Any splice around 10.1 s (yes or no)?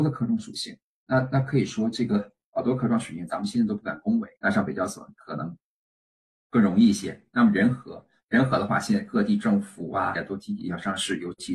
yes